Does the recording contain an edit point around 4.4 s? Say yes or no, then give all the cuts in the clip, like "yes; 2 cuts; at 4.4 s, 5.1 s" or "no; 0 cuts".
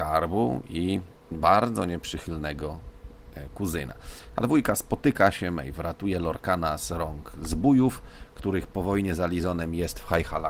no; 1 cut; at 1.3 s